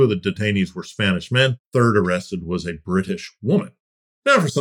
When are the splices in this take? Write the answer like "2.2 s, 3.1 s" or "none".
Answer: none

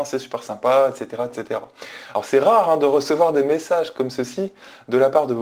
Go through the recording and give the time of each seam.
none

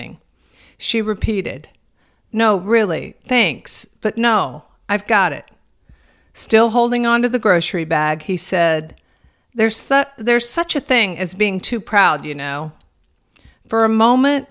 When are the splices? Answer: none

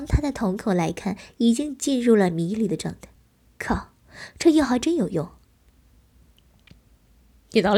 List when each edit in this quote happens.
none

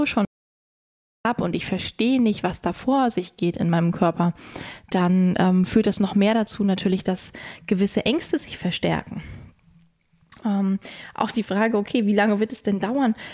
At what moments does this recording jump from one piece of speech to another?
none

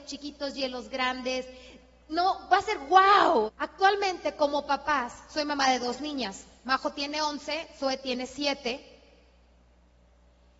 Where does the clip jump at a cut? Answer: 3.5 s

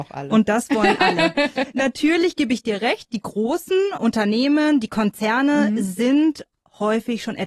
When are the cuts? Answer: 4.0 s

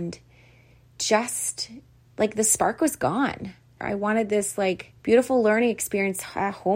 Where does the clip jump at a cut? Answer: 3.8 s, 5.0 s

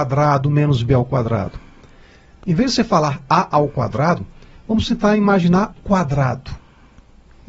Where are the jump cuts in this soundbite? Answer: 2.4 s, 5.7 s

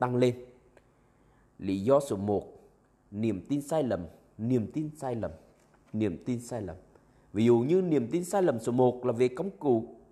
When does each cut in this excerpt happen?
none

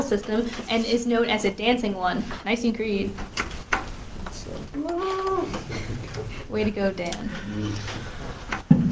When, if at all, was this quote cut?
2.4 s

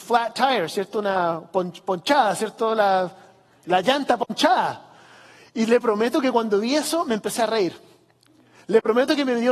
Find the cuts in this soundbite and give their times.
none

